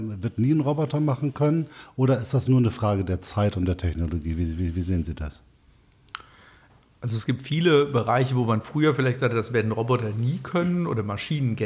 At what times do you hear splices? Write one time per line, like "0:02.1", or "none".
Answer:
none